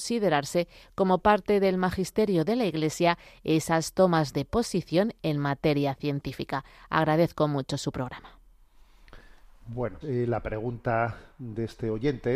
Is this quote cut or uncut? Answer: cut